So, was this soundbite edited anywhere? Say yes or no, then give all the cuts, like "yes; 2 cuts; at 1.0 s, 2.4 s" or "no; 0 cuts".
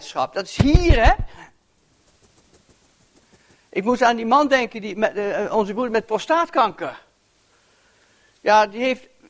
no; 0 cuts